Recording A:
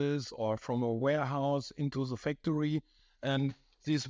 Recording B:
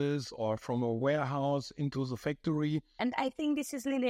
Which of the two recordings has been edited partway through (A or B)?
B